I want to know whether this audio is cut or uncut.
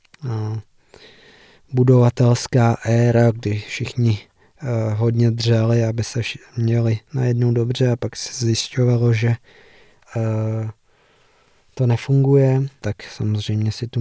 cut